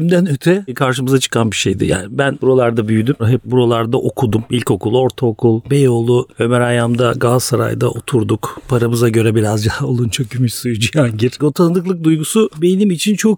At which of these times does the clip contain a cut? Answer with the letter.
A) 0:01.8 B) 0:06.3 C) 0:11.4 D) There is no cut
C